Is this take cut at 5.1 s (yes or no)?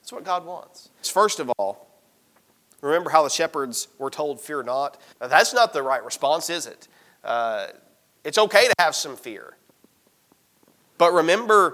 yes